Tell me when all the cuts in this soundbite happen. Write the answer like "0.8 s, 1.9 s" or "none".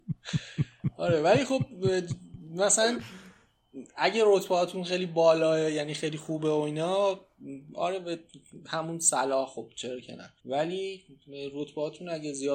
10.4 s